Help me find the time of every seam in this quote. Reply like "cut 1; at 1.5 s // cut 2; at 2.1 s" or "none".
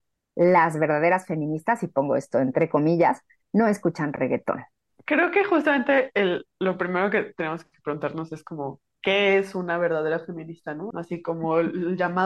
cut 1; at 10.9 s